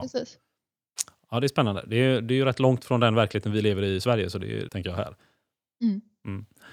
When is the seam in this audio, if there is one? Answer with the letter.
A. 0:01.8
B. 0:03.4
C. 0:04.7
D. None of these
C